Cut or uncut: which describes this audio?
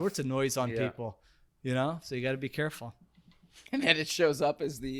uncut